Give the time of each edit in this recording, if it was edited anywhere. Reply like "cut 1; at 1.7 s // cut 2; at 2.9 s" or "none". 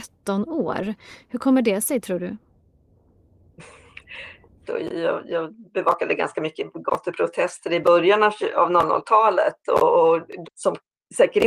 cut 1; at 4.6 s // cut 2; at 10.4 s